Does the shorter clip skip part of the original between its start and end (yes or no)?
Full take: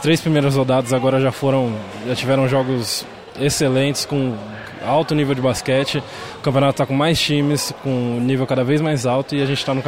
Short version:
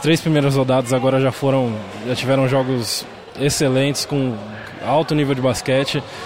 no